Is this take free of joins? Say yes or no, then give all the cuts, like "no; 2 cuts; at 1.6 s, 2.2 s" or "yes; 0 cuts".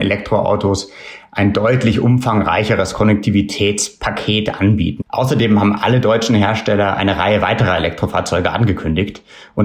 no; 1 cut; at 5.0 s